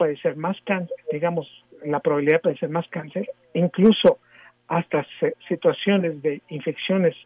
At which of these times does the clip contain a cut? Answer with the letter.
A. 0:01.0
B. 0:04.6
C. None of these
C